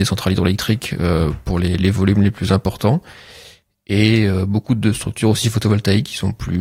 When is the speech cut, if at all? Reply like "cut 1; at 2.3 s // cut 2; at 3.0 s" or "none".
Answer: cut 1; at 1.8 s